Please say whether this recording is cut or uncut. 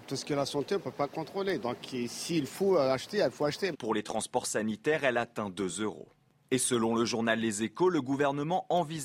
cut